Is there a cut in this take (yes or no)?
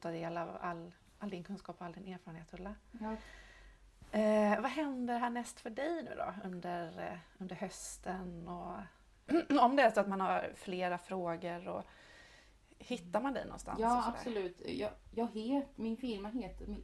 no